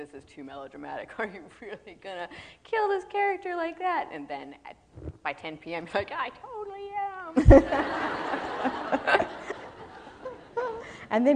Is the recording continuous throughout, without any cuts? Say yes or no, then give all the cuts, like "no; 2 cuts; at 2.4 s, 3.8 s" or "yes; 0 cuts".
yes; 0 cuts